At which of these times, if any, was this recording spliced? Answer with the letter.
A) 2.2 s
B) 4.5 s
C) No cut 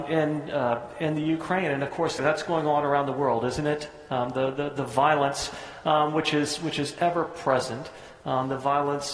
A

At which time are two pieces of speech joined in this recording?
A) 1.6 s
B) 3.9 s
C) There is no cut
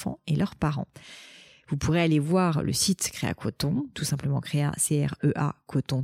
B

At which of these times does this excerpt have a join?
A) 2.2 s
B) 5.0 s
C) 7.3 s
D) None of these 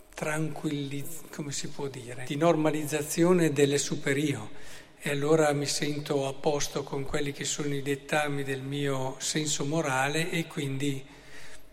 A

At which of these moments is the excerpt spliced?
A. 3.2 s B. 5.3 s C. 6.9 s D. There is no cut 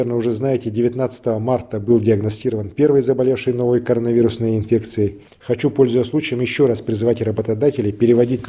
B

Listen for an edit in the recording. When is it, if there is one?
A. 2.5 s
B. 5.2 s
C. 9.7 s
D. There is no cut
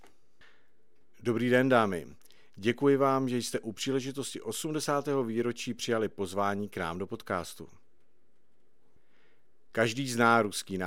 D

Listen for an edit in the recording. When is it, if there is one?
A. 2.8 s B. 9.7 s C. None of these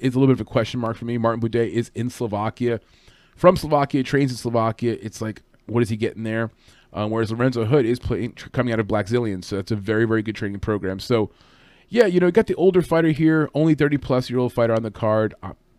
C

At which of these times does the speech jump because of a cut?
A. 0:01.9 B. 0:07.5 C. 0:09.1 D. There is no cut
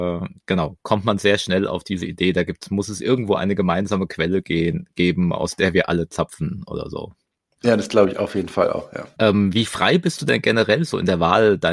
D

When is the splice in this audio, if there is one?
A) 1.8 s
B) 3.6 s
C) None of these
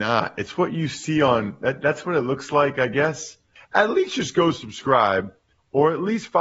B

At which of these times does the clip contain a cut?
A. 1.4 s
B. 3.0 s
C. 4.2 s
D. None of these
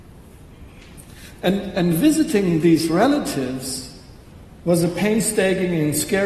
A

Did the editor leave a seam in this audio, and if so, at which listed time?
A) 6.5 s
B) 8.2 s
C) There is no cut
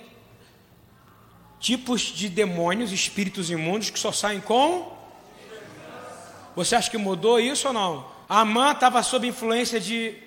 B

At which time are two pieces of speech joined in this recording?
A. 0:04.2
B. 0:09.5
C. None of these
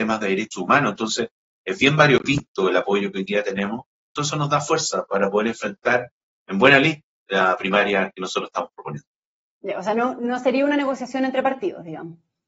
A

